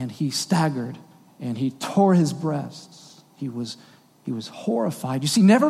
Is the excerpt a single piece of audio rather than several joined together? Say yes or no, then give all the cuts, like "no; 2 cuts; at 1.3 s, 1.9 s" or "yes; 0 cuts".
yes; 0 cuts